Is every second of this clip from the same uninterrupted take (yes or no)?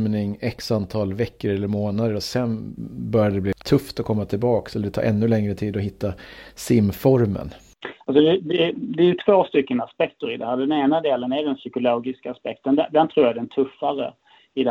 yes